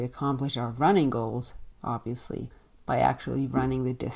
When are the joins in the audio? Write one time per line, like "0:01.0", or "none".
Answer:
none